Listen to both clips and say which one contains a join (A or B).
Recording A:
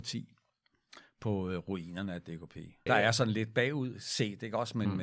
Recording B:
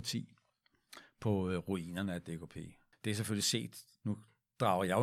A